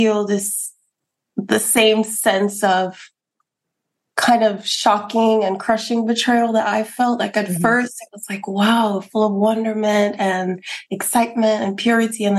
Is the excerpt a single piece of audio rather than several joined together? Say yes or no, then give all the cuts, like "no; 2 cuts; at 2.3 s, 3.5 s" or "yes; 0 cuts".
yes; 0 cuts